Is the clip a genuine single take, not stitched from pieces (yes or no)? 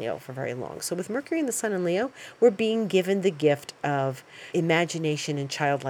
no